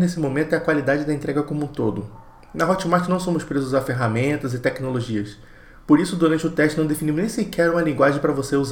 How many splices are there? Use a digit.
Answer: 0